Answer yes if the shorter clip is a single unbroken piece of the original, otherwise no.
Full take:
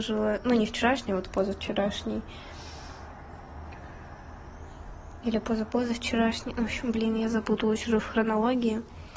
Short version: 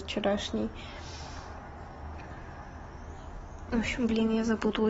no